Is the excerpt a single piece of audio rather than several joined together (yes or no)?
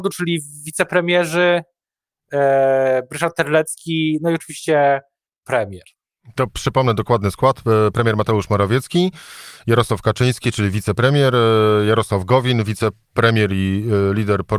yes